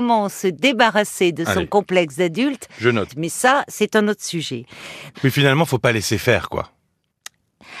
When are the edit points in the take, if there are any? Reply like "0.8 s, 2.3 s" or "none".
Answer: 3.1 s, 5.1 s